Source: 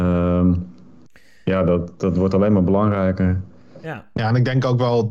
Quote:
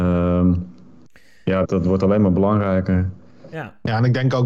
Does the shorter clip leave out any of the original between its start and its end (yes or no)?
yes